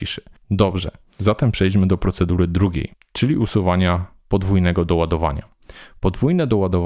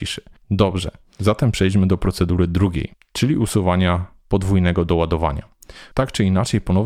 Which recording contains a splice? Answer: second; 1 cut; at 5.9 s

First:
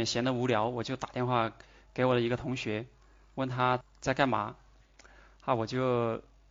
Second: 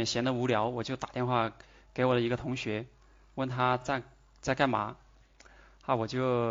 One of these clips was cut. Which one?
first; 1 cut; at 3.8 s

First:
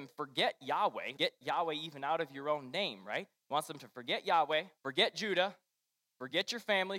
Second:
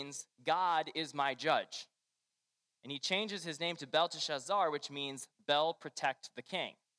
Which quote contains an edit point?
first; 2 cuts; at 1.2 s, 4.8 s

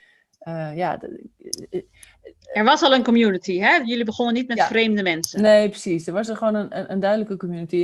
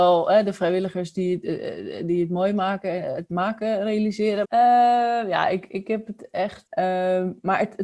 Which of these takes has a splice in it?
second; 2 cuts; at 4.4 s, 6.7 s

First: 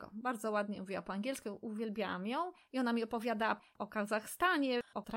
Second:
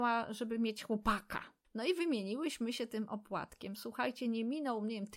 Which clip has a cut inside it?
second; 1 cut; at 1.6 s

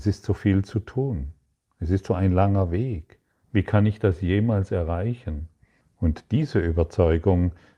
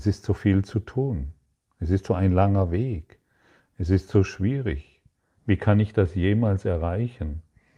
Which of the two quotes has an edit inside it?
first; 2 cuts; at 3.3 s, 5.8 s

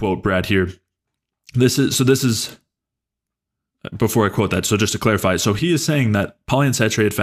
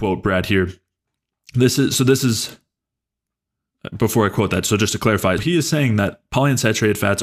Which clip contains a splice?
second; 1 cut; at 5.4 s

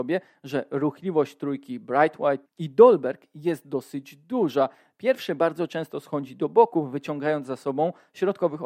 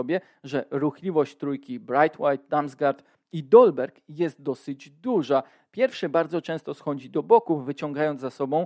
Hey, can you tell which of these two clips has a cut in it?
first; 1 cut; at 2.5 s

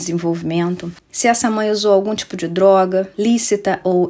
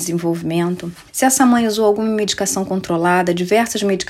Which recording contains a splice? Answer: first; 1 cut; at 1.0 s

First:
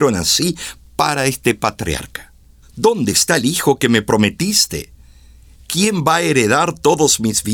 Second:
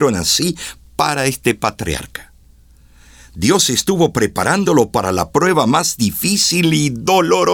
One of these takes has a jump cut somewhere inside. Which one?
first; 1 cut; at 2.6 s

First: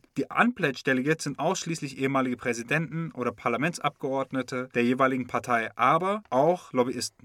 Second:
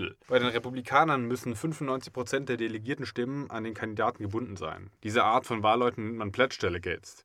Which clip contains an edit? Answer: second; 1 cut; at 5.0 s

